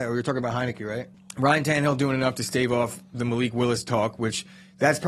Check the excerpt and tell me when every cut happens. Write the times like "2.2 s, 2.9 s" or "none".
1.1 s